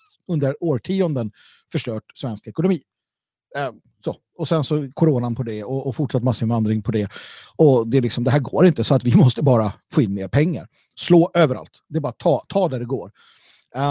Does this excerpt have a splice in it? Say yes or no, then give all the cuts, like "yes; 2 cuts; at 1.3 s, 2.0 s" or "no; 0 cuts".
no; 0 cuts